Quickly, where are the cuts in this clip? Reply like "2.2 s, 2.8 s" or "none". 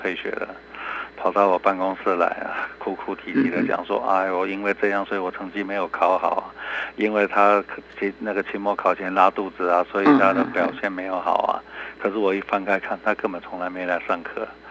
none

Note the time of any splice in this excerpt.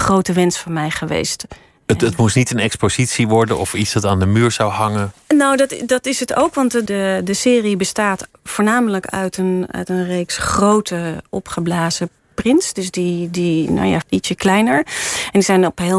6.9 s, 14.0 s

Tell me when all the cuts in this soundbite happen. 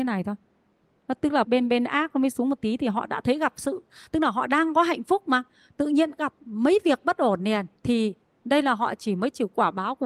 1.4 s, 7.8 s

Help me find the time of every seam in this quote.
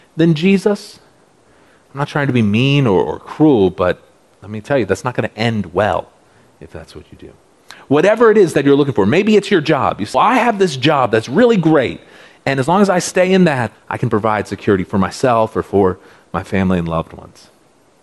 10.1 s, 13.7 s

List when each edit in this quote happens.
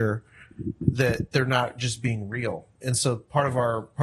none

